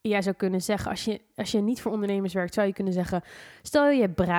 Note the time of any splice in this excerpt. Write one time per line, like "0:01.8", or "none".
none